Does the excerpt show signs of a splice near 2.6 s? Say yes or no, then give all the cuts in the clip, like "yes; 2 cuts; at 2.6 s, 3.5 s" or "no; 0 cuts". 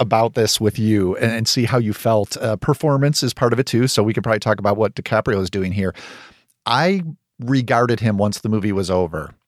no; 0 cuts